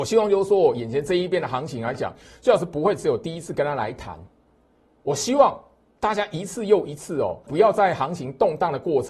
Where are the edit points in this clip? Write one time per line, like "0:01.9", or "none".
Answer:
0:07.5